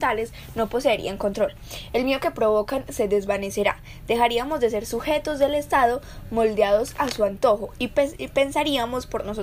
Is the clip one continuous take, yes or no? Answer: yes